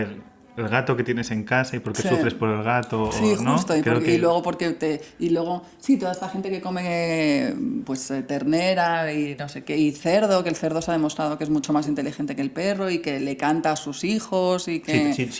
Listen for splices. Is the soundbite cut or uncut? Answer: uncut